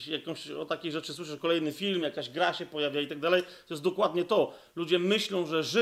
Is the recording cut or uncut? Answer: uncut